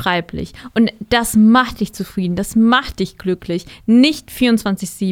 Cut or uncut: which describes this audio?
uncut